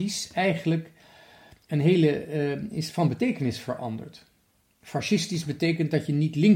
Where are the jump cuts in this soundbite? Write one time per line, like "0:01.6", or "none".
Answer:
none